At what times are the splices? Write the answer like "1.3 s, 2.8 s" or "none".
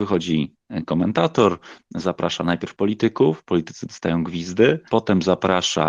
4.9 s